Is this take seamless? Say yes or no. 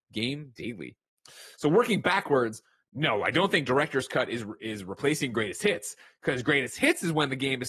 yes